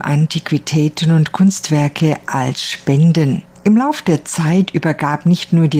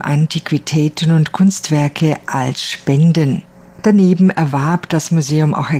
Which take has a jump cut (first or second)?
first